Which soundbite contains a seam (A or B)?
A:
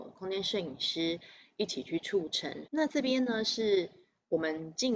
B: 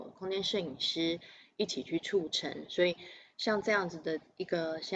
A